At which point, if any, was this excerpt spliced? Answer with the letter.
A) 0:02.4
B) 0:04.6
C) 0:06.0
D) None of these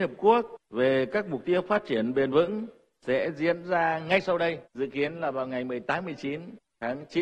B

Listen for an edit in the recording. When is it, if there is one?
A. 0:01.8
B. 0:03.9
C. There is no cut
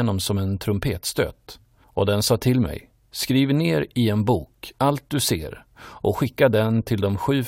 C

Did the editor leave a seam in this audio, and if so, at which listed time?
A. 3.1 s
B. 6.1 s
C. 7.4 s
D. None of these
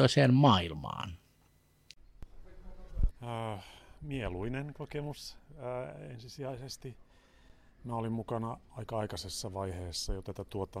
A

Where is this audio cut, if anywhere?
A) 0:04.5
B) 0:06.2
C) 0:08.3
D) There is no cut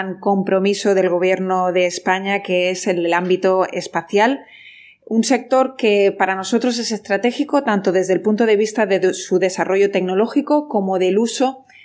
D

